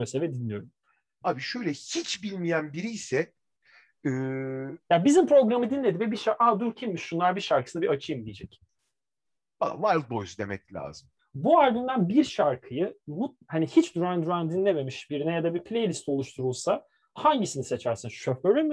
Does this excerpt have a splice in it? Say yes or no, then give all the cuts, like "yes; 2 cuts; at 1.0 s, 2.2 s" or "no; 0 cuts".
yes; 1 cut; at 11.2 s